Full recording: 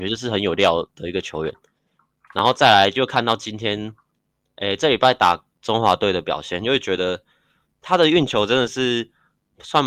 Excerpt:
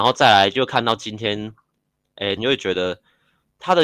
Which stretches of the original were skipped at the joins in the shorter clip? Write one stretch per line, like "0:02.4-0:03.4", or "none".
0:04.8-0:06.6